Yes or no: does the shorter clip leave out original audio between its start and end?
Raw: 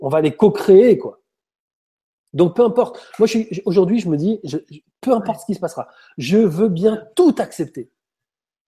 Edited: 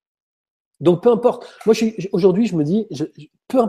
no